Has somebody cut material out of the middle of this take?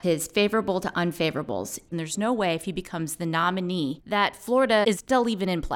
yes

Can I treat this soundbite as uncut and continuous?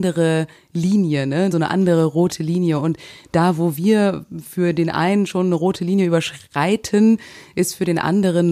yes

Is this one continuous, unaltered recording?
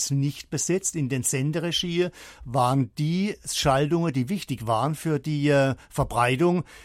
yes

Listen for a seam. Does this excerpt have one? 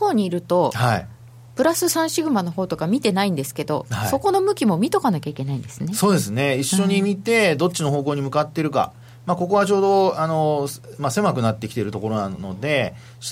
no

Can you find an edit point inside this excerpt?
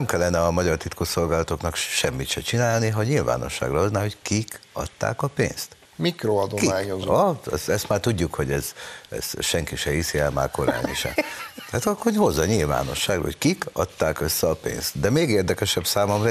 yes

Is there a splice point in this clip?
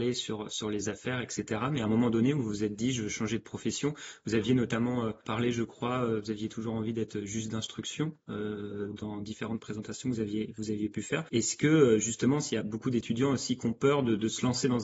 no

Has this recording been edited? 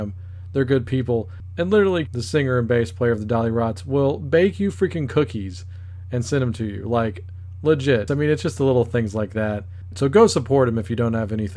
yes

